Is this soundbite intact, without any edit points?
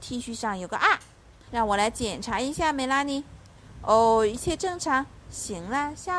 no; 1 cut; at 1.5 s

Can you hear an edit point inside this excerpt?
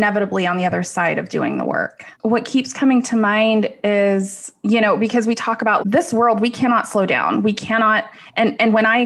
yes; 2 cuts; at 2.1 s, 5.8 s

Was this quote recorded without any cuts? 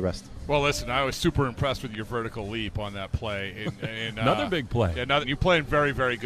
no; 1 cut; at 5.2 s

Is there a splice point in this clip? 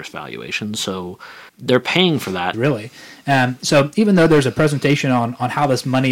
yes; 2 cuts; at 1.5 s, 2.5 s

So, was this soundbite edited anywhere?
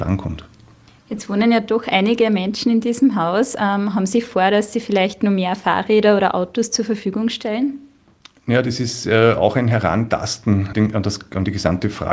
yes; 1 cut; at 10.7 s

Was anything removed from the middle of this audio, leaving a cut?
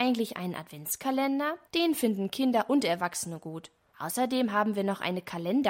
yes; 2 cuts; at 1.7 s, 3.9 s

